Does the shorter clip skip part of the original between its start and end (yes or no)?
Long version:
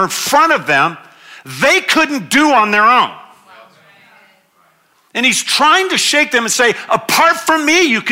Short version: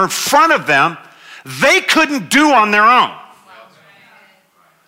no